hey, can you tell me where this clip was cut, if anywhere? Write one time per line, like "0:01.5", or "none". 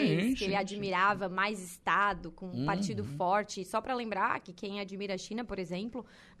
none